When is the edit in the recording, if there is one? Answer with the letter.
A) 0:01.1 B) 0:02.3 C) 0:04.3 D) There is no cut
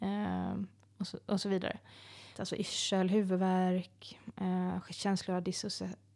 B